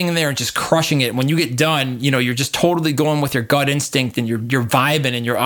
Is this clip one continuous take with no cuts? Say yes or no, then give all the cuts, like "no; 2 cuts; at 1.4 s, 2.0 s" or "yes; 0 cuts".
yes; 0 cuts